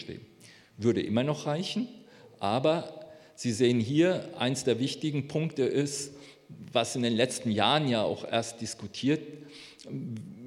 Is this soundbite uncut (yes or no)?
yes